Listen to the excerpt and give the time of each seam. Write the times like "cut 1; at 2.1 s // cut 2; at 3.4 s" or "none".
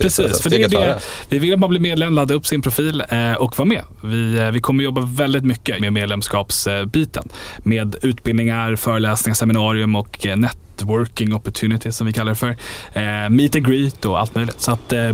cut 1; at 5.8 s